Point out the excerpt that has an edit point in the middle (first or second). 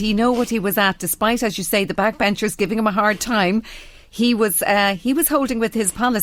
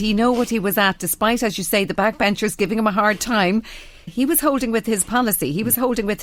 second